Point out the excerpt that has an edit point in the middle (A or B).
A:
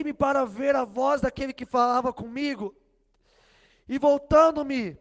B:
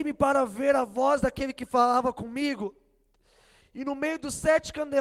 B